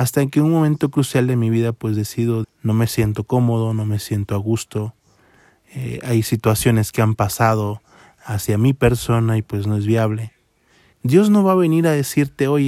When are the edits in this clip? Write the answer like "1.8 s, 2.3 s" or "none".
2.4 s, 10.9 s